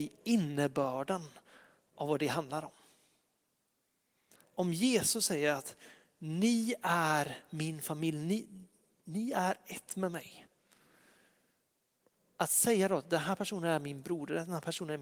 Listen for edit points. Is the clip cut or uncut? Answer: uncut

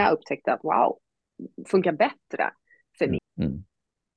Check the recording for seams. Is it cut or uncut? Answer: cut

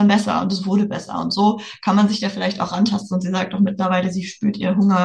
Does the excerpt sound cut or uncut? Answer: uncut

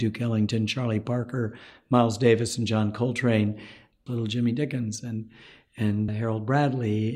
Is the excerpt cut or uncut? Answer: cut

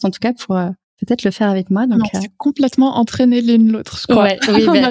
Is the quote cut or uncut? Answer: uncut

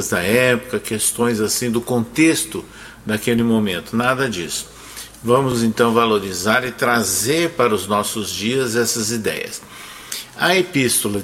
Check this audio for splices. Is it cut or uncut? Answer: uncut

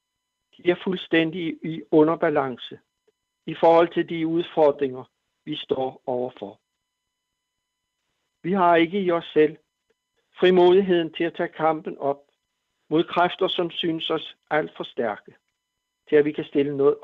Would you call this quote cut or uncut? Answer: uncut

